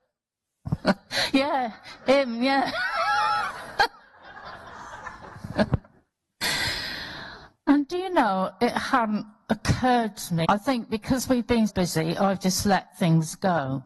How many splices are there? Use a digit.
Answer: 2